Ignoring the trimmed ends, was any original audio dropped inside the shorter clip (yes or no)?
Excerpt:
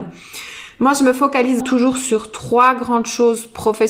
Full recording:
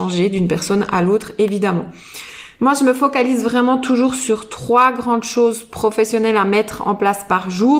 yes